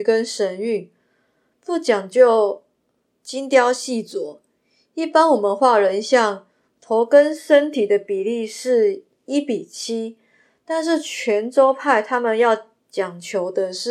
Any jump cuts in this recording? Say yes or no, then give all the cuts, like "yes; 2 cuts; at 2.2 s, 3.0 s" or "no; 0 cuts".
no; 0 cuts